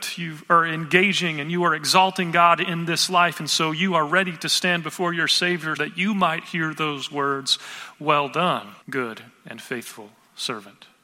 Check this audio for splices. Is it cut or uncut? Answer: cut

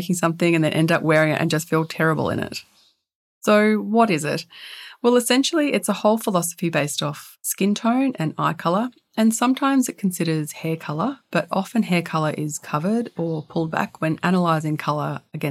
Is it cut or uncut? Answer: uncut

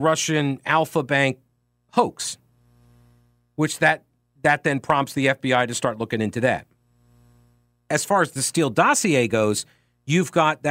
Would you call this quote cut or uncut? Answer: uncut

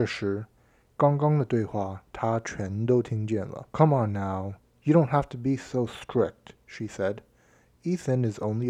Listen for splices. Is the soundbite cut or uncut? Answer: cut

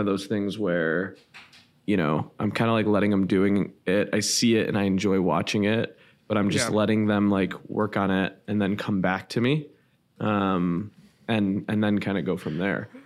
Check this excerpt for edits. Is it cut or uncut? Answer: uncut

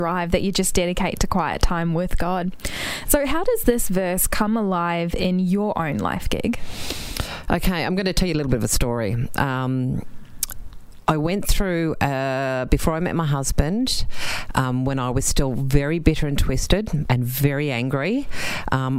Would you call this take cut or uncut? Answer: uncut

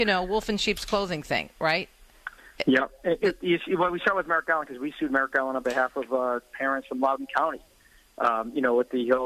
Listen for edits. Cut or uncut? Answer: uncut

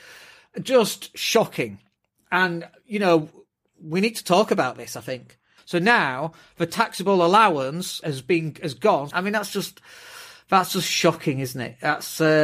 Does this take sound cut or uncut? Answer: cut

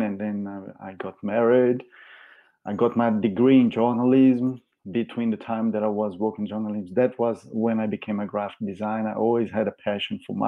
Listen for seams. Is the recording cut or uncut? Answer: uncut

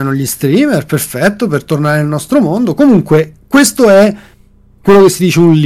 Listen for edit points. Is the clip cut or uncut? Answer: uncut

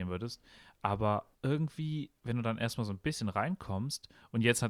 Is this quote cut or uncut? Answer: cut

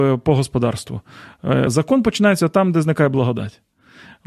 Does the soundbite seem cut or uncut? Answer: cut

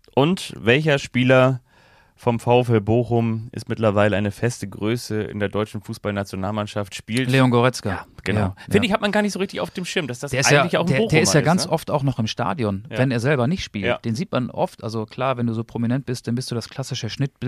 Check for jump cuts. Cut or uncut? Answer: uncut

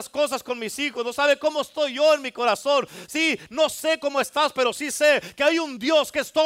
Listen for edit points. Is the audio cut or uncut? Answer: uncut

